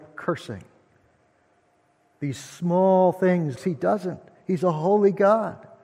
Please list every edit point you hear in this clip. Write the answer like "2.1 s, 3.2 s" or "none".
3.6 s